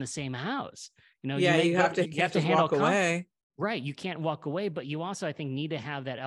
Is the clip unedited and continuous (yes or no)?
no